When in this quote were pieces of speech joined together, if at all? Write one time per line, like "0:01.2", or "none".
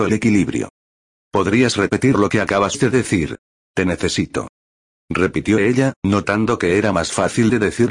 0:03.7